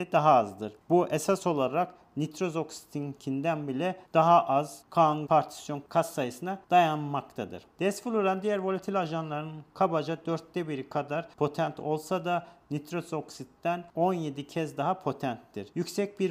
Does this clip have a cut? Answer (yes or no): yes